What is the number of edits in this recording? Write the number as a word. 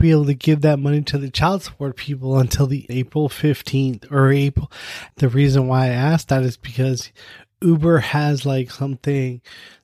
two